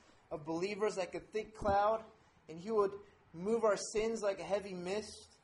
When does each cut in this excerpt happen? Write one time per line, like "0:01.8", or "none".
none